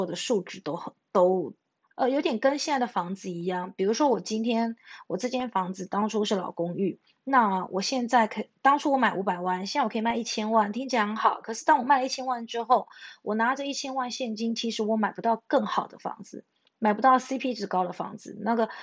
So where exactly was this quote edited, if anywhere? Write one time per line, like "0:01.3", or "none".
0:01.8